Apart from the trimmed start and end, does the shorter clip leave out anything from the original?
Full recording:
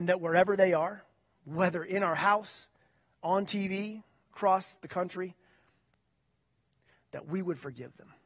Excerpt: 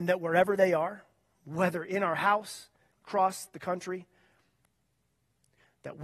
yes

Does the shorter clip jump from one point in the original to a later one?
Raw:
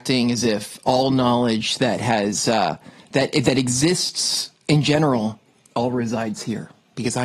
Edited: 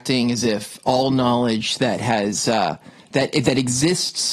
no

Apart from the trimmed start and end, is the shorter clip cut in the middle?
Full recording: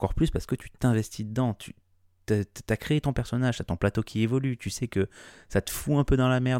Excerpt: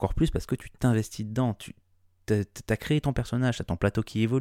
no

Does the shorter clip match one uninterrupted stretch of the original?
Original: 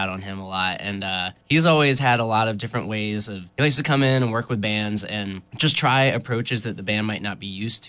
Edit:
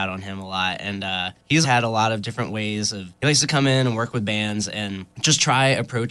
no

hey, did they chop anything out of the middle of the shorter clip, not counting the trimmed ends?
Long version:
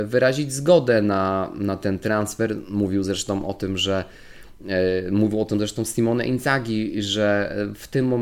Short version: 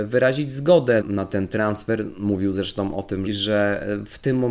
yes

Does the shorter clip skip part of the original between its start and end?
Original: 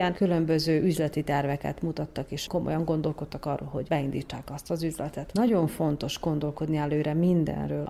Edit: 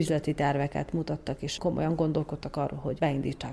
no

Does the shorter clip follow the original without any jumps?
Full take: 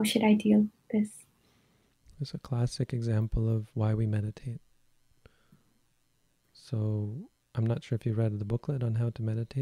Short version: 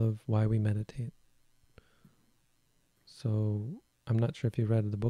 yes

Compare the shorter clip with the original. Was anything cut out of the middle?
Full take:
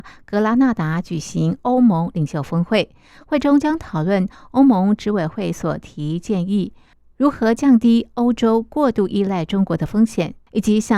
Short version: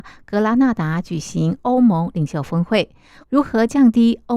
yes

